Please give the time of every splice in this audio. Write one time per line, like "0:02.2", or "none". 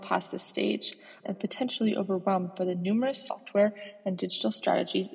0:01.2